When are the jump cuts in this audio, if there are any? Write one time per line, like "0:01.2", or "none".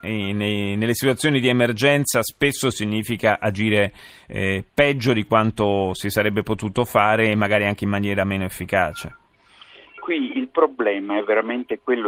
0:10.0